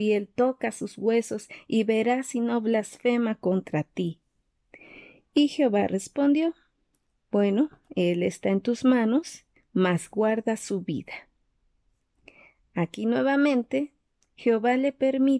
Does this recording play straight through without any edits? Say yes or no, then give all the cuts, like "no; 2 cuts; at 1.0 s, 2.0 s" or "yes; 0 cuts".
yes; 0 cuts